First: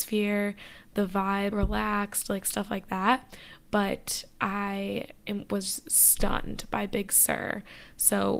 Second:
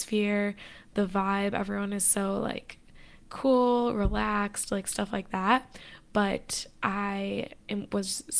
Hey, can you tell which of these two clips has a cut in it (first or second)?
first